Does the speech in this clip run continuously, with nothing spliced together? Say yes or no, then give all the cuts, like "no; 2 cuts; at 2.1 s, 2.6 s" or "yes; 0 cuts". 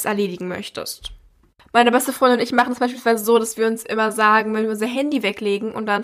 yes; 0 cuts